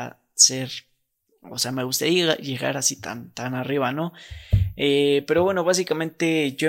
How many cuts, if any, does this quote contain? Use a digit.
0